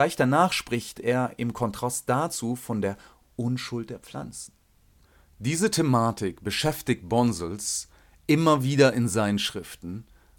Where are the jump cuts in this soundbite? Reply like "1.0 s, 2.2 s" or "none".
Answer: none